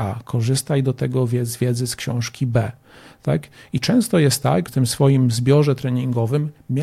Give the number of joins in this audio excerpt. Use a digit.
1